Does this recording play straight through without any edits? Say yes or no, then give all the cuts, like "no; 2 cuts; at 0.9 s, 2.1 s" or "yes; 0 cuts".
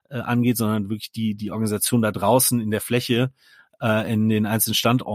yes; 0 cuts